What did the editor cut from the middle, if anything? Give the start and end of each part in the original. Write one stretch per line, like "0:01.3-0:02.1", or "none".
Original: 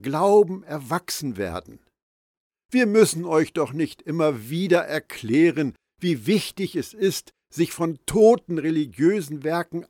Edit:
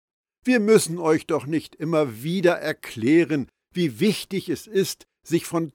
none